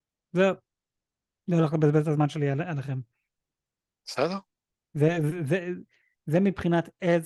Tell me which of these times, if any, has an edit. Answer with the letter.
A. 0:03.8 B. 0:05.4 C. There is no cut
C